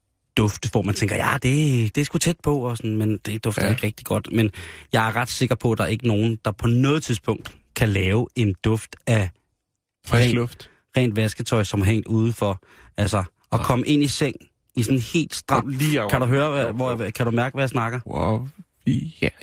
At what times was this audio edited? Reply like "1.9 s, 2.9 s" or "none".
1.9 s, 15.6 s, 18.1 s

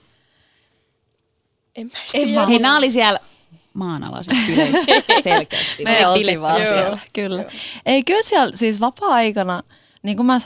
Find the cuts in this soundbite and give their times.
2.5 s

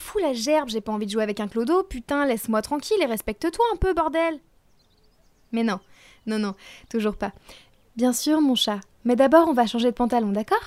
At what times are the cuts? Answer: none

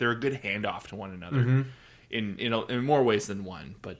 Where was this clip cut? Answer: 2.4 s

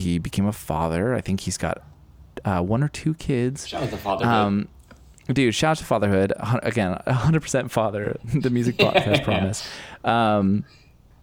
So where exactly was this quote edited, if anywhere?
none

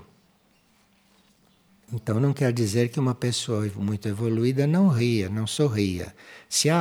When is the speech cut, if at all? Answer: none

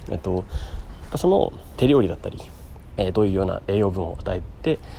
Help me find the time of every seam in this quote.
1.8 s, 3.0 s

